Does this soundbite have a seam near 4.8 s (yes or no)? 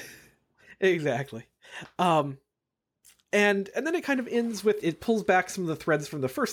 yes